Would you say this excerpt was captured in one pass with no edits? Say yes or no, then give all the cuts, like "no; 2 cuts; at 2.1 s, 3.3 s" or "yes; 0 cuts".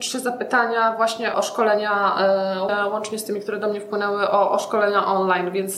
no; 2 cuts; at 1.3 s, 2.7 s